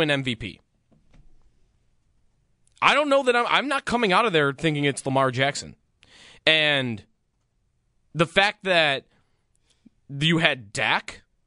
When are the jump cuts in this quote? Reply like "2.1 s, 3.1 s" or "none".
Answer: none